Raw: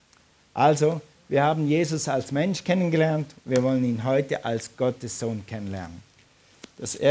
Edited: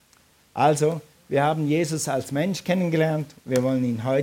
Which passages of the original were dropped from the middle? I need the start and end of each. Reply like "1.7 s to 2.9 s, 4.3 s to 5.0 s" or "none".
none